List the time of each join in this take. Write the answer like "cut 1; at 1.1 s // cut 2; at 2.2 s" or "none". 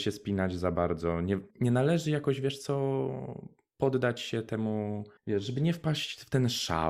cut 1; at 1.5 s // cut 2; at 5.2 s